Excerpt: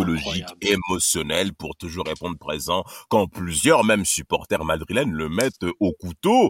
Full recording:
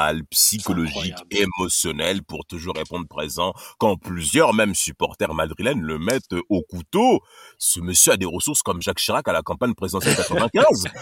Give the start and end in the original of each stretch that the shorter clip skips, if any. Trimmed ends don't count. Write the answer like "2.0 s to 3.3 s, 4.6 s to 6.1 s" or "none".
none